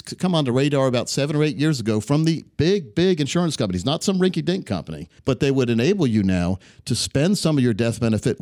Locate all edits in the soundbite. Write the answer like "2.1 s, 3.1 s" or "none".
5.2 s